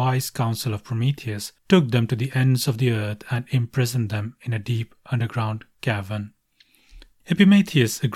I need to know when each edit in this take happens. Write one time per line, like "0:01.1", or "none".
0:01.6
0:07.2